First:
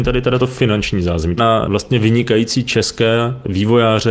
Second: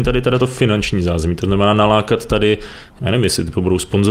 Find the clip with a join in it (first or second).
first